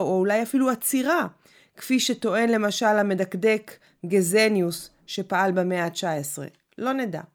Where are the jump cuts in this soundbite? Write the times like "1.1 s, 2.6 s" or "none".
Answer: none